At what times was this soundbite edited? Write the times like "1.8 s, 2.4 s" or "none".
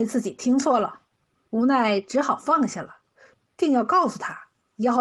1.5 s, 3.3 s